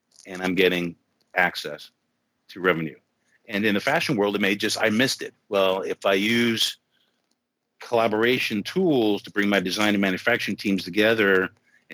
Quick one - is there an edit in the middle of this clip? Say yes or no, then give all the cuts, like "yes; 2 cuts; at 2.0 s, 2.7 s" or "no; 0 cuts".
yes; 1 cut; at 5.3 s